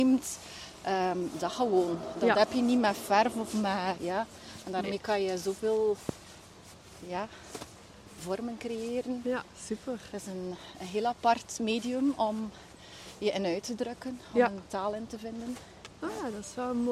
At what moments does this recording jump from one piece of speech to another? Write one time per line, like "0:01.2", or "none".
none

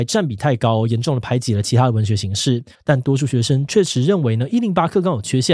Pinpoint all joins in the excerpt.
0:02.7

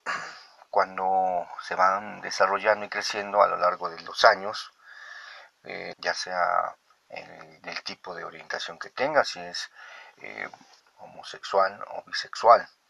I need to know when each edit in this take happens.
0:05.9
0:10.8

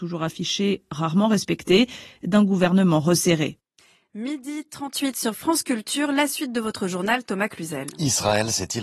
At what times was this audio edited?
none

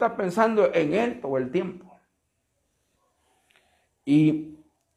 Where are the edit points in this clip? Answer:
none

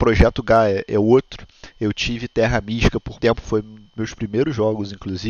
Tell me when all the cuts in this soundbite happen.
0:03.2

